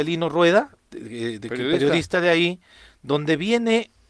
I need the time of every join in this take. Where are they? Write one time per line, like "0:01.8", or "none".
none